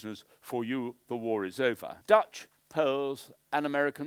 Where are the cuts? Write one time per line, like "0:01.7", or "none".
0:02.0